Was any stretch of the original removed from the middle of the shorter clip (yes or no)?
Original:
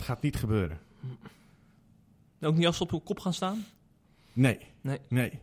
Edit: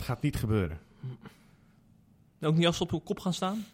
no